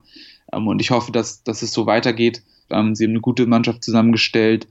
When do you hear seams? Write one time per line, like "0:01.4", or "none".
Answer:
0:02.7